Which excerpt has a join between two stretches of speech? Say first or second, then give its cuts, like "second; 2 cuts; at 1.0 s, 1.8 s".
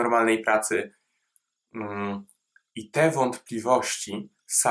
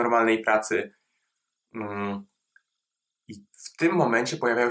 first; 1 cut; at 2.7 s